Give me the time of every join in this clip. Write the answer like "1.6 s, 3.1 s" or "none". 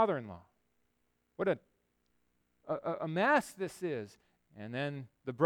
4.4 s